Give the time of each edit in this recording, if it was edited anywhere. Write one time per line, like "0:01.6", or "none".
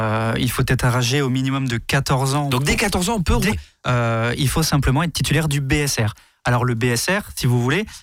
0:03.5

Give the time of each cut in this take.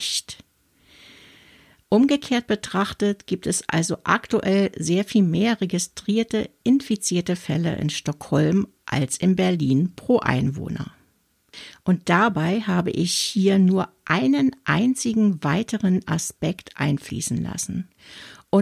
0:01.8

